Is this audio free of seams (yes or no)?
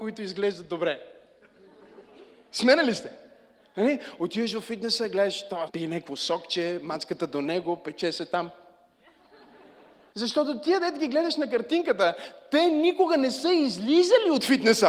no